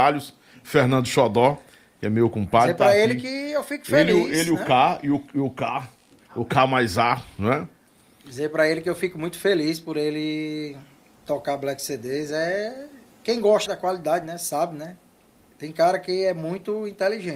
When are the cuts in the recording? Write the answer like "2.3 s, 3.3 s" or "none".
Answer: 13.7 s